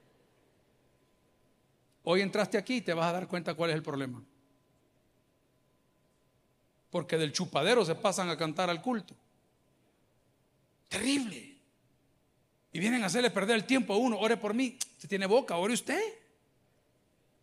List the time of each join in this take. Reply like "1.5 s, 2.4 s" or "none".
6.8 s